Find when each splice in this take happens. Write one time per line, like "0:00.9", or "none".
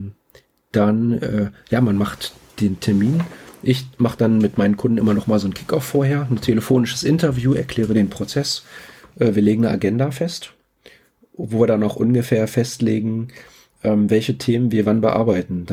none